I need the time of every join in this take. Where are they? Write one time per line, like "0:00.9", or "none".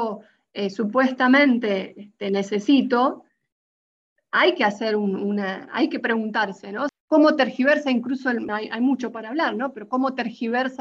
0:06.9
0:08.5